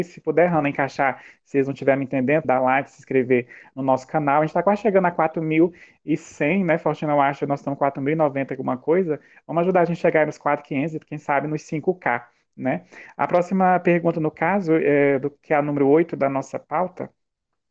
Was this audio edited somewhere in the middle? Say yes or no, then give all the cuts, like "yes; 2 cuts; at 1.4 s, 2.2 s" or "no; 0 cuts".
yes; 1 cut; at 2.4 s